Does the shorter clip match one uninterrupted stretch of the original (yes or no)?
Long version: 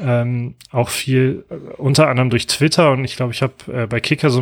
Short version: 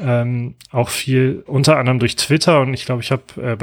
no